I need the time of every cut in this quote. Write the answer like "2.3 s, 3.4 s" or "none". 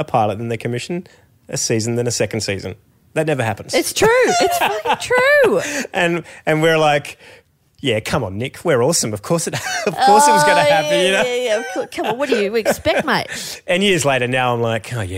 none